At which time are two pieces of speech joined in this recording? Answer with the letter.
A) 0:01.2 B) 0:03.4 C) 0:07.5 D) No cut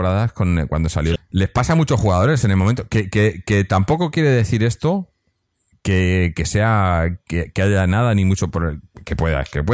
A